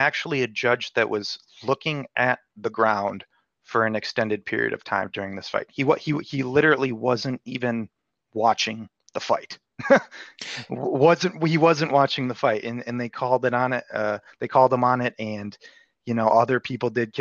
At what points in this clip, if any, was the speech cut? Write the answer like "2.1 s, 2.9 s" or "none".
none